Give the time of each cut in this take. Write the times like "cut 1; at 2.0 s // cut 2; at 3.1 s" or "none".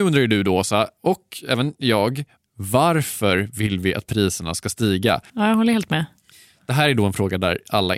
cut 1; at 2.4 s // cut 2; at 5.3 s